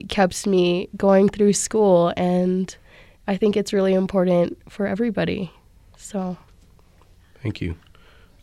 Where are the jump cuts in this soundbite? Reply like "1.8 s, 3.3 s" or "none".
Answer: none